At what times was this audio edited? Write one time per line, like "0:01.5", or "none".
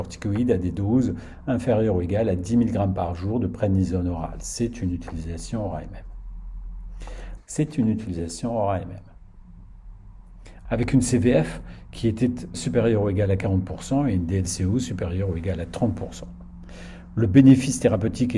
0:07.4
0:10.7
0:12.5

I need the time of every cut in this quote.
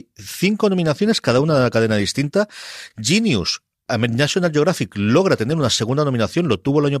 none

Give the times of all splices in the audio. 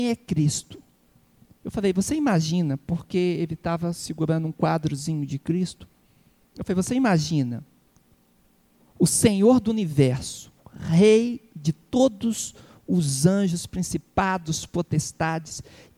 none

